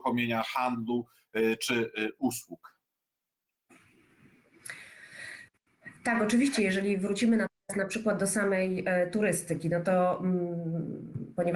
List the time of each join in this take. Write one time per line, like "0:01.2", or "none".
none